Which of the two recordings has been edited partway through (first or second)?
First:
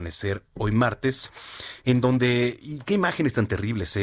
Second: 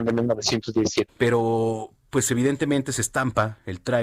second